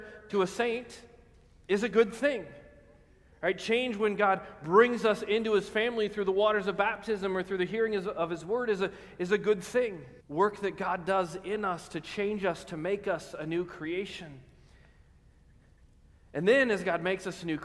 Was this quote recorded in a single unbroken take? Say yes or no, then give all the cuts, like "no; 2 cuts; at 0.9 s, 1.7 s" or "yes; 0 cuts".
no; 1 cut; at 10.2 s